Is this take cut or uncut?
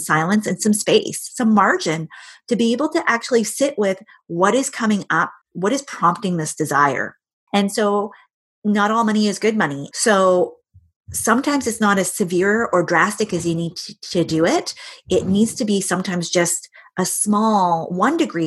cut